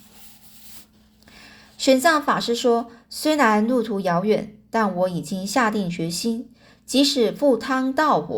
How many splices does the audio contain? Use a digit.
0